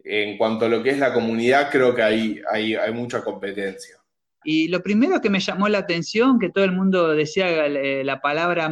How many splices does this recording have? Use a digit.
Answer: 1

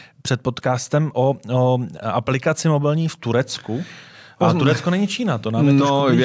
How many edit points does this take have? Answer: 0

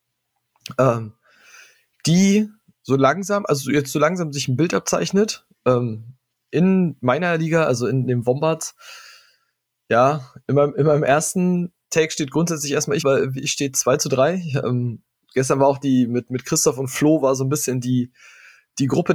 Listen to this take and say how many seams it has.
1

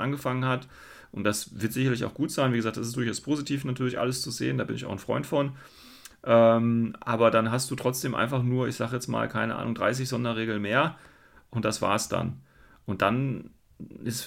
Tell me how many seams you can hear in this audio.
0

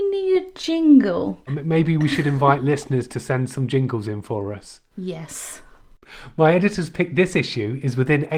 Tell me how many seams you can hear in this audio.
1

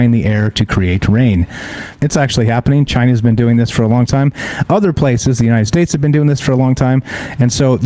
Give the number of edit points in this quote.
1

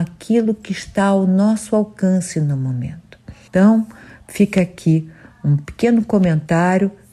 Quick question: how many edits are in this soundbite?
1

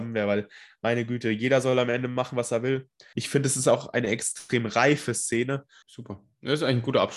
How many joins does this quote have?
2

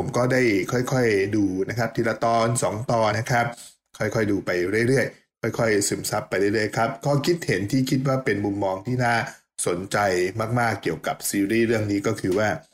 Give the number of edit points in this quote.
1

